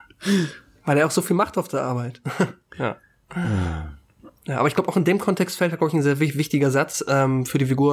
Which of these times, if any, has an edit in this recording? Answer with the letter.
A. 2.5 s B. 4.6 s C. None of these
C